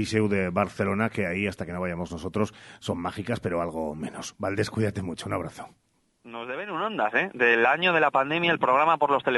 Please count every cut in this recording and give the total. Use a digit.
0